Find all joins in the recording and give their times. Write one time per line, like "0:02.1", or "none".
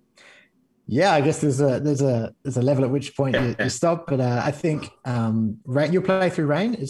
none